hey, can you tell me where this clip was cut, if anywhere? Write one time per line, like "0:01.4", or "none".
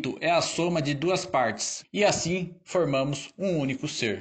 0:01.8